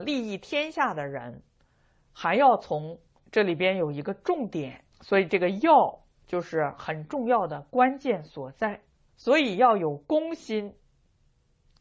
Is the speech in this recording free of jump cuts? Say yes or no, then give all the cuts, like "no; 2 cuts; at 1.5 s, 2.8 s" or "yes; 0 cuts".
no; 3 cuts; at 3.2 s, 4.9 s, 9.1 s